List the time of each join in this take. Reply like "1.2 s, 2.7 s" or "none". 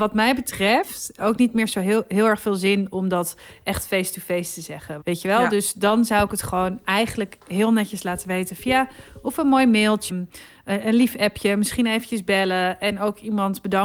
5.0 s, 10.1 s